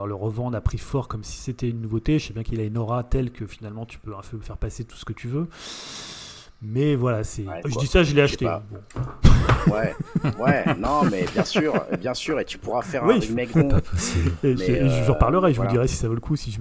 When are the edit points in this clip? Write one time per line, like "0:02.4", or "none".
0:07.6
0:13.5